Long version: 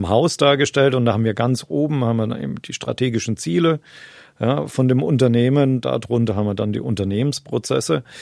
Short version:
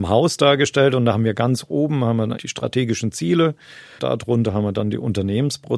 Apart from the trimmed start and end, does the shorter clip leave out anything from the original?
yes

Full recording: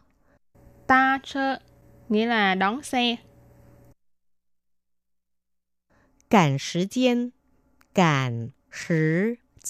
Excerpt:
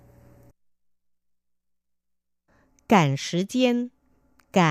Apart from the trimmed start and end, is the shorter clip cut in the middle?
no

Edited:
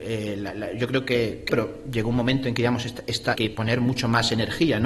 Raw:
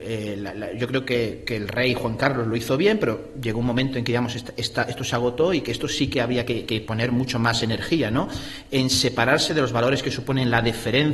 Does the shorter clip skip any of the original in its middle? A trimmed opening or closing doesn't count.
yes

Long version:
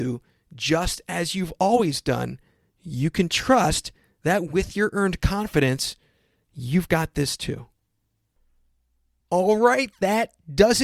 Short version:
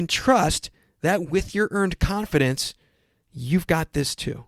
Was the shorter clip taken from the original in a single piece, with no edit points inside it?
yes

